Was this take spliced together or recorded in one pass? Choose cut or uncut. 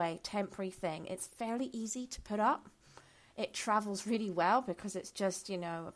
uncut